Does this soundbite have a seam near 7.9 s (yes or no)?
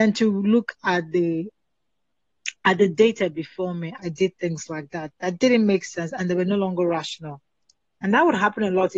no